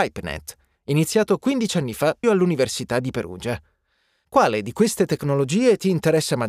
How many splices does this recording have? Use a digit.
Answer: 1